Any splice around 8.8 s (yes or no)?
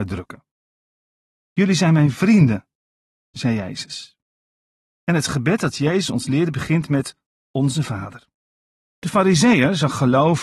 yes